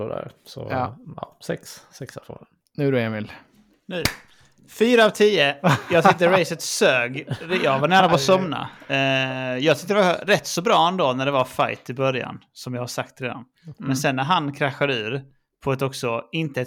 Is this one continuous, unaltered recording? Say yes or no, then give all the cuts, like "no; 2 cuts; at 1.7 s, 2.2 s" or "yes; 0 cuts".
yes; 0 cuts